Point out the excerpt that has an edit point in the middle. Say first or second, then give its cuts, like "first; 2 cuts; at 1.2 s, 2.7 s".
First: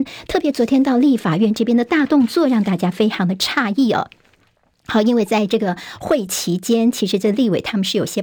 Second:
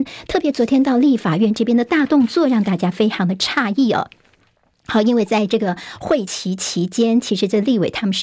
first; 1 cut; at 6.3 s